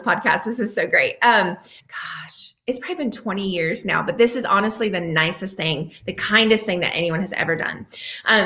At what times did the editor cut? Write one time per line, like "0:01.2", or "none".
0:01.8